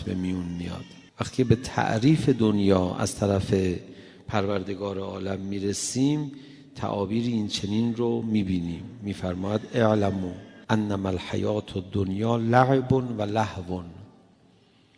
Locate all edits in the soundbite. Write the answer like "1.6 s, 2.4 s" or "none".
1.1 s, 10.6 s